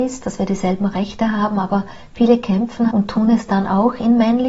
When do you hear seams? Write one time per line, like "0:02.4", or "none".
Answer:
0:02.9